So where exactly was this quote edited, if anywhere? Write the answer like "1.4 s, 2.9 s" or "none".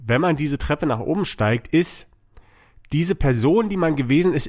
none